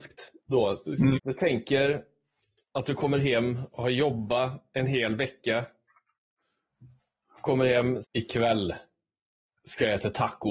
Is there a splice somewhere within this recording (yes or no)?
yes